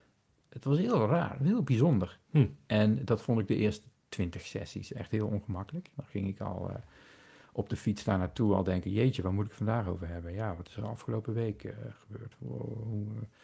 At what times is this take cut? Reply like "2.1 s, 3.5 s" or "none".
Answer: none